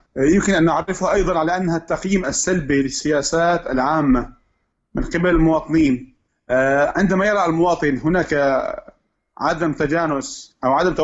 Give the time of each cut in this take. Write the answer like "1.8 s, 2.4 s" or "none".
none